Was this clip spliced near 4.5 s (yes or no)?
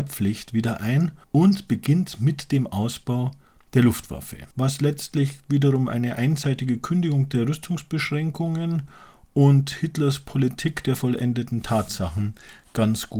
yes